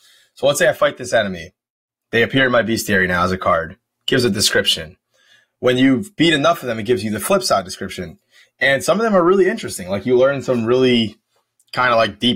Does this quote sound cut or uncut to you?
uncut